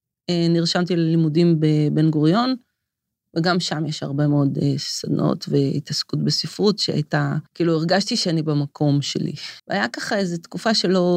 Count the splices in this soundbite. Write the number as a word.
two